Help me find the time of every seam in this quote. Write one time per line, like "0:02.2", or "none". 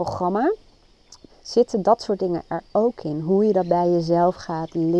0:01.3

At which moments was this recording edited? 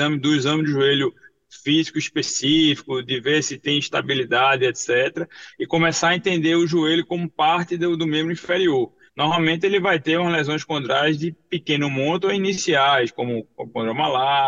0:09.1

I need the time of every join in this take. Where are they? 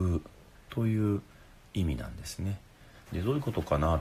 0:03.1

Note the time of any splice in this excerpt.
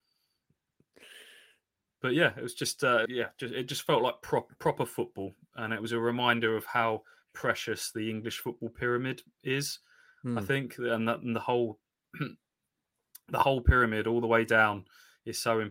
0:03.1

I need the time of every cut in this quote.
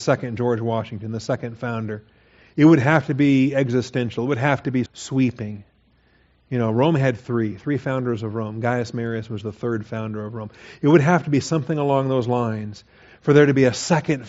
0:04.9

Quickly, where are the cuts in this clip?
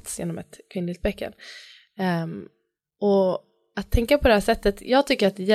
none

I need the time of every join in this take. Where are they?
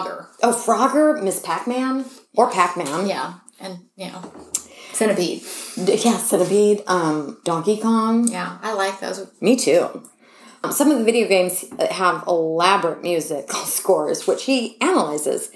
none

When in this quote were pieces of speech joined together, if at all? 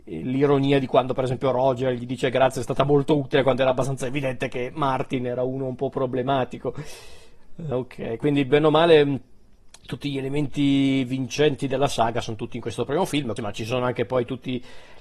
0:07.7
0:13.4

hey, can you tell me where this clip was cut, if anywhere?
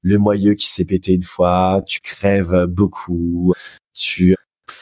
none

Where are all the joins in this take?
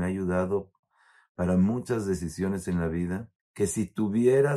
0:03.4

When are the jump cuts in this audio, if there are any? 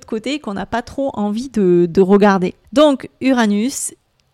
0:02.6

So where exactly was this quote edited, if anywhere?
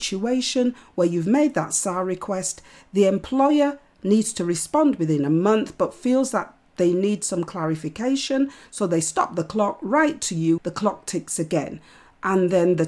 0:10.6

